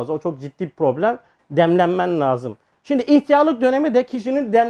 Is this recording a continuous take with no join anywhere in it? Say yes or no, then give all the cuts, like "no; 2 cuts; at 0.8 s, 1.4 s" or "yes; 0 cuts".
no; 2 cuts; at 1.4 s, 2.7 s